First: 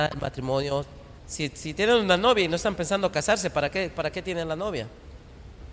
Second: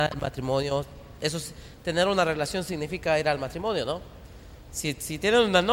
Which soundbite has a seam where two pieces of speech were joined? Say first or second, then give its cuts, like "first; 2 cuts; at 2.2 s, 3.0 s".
first; 1 cut; at 1.2 s